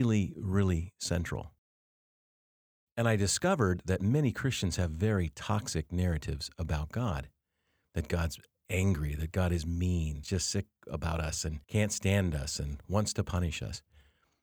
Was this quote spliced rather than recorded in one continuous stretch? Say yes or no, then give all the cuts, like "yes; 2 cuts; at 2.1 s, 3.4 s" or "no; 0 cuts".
yes; 2 cuts; at 10.2 s, 11.6 s